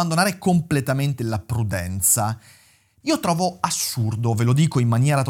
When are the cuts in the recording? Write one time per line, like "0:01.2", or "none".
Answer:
0:03.0